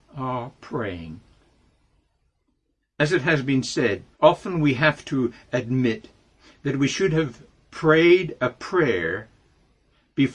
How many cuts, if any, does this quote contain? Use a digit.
1